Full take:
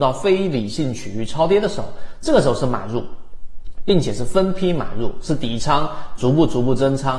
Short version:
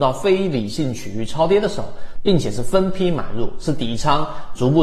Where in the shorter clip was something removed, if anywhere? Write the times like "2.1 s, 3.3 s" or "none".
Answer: 2.1 s

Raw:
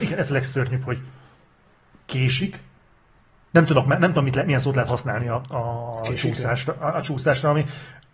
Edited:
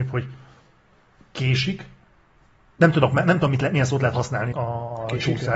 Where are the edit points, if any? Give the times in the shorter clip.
4.5 s

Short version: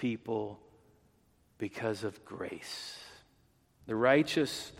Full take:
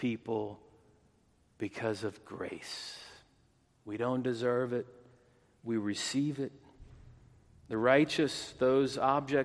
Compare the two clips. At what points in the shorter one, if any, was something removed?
3.8 s

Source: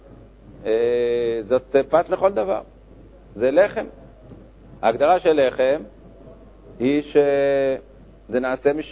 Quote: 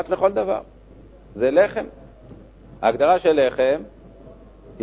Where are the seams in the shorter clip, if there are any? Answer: none

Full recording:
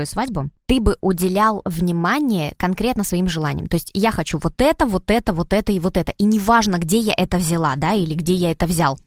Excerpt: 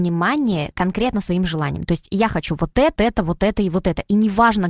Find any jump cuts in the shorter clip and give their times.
3.0 s

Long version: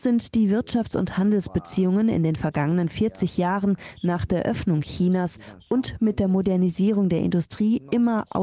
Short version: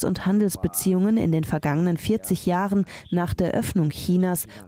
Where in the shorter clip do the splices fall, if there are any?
none

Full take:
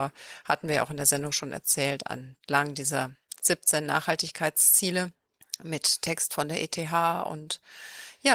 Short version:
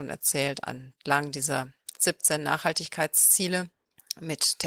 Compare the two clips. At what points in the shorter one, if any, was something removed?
none

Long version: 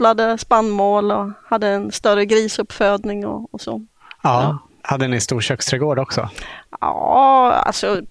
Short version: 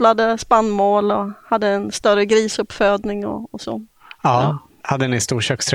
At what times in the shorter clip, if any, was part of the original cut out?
none

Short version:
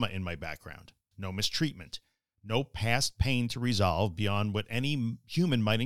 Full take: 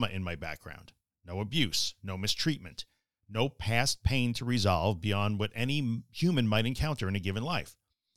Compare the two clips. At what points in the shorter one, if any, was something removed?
1.1 s

